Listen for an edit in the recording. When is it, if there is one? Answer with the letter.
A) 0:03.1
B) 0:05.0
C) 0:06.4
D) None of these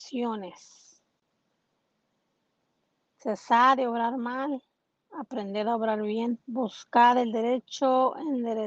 C